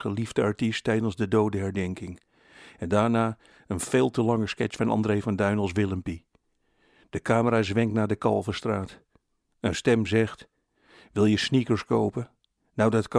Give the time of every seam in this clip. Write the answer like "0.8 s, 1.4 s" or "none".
none